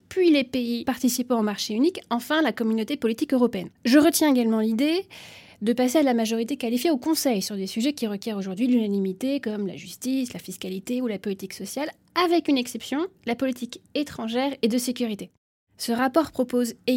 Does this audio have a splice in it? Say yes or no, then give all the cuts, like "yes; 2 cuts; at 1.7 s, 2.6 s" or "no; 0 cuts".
yes; 1 cut; at 3.7 s